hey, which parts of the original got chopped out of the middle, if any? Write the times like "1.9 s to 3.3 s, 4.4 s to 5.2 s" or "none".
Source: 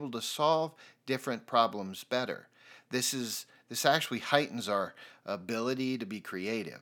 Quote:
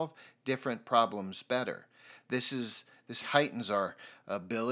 3.8 s to 4.2 s